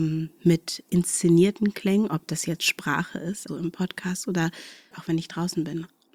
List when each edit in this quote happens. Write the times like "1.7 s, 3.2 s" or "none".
3.5 s, 4.9 s